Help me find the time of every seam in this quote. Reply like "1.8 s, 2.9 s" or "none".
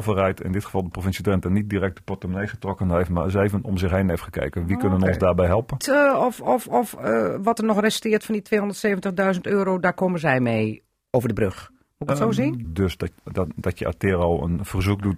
5.8 s, 12.6 s